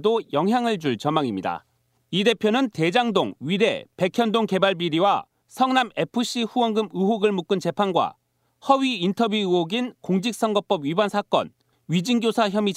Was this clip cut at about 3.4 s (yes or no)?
no